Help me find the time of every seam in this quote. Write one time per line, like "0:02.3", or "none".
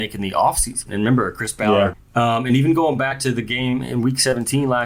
0:01.9